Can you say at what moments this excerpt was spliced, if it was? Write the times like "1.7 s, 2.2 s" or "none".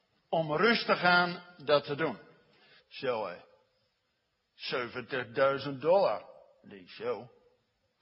2.8 s